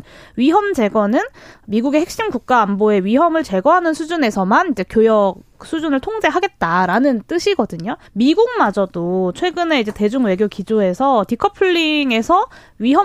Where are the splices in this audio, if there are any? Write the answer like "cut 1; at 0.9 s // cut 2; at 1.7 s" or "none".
cut 1; at 8.1 s